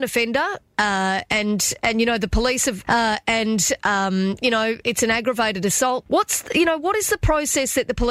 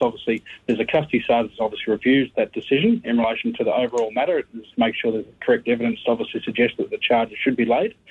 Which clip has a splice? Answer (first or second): first